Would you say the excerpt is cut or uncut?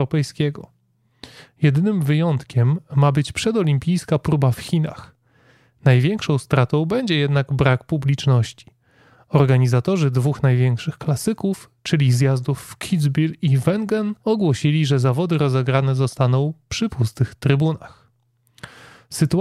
cut